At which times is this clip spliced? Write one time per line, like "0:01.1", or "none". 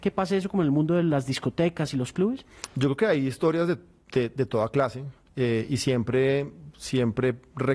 none